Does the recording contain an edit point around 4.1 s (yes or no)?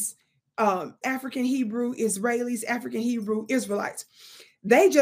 no